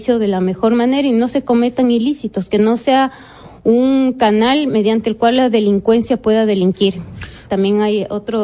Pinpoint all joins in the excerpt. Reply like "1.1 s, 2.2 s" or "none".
7.5 s